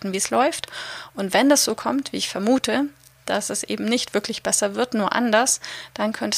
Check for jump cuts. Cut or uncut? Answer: uncut